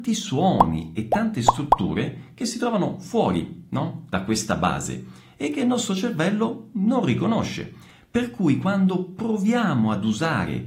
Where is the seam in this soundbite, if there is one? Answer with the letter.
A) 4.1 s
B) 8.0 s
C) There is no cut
C